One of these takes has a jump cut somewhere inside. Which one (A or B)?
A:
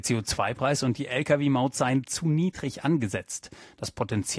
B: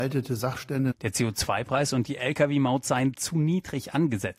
B